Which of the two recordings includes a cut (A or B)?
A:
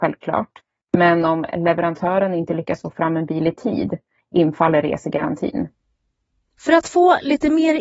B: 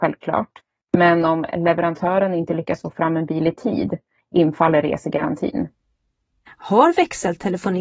B